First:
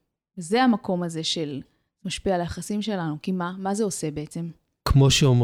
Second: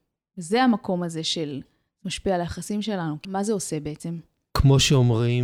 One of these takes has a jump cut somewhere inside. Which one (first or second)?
second